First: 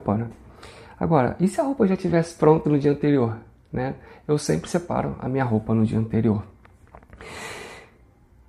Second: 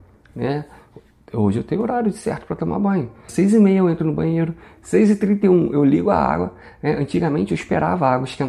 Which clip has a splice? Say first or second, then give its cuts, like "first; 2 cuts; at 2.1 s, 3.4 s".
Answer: second; 1 cut; at 3.3 s